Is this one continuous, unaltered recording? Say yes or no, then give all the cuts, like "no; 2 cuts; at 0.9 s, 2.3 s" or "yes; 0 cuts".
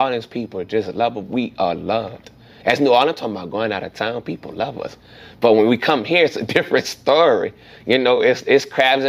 yes; 0 cuts